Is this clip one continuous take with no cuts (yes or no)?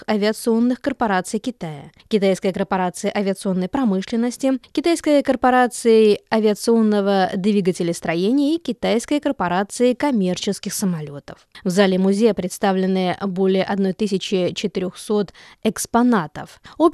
yes